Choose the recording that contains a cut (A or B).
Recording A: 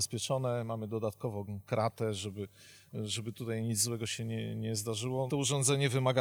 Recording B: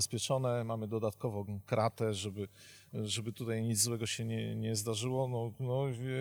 A